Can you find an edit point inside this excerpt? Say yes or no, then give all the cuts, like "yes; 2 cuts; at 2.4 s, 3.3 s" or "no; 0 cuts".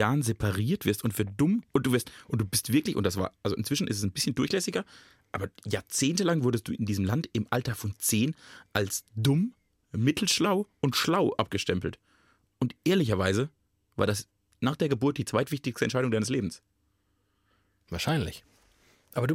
no; 0 cuts